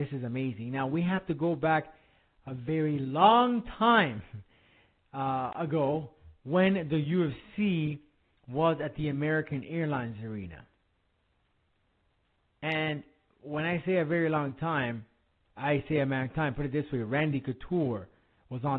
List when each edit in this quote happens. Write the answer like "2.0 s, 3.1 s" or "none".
none